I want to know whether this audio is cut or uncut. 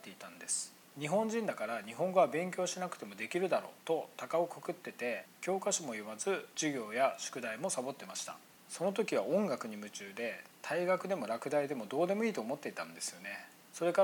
uncut